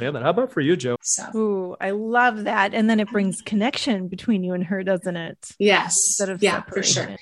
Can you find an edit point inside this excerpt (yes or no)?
yes